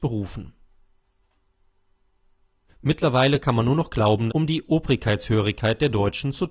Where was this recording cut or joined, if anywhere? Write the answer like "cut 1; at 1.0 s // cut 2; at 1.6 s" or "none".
cut 1; at 2.7 s // cut 2; at 4.3 s